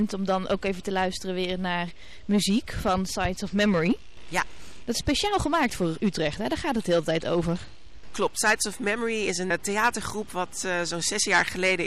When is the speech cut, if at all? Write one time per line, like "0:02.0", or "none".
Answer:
0:09.5